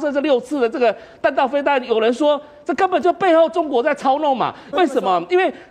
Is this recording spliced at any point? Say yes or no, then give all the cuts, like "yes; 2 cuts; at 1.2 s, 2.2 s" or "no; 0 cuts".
yes; 1 cut; at 4.7 s